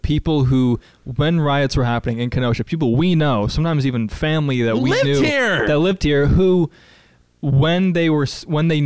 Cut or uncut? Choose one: uncut